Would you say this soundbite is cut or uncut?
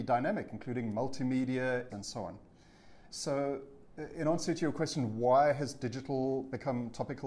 cut